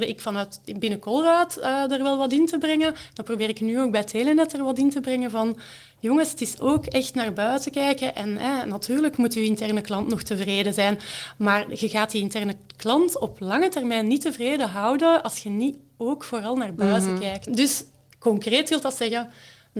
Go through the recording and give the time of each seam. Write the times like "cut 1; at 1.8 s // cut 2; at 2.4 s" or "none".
cut 1; at 17.5 s